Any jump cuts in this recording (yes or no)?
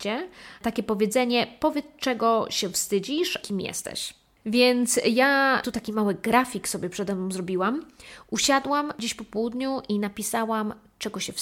yes